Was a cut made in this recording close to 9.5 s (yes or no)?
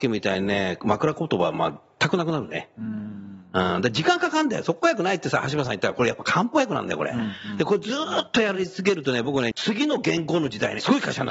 yes